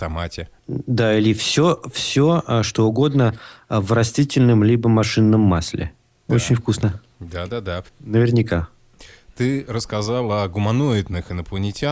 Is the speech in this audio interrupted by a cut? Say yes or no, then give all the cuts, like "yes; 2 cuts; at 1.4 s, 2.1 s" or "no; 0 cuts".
yes; 2 cuts; at 6.3 s, 7.9 s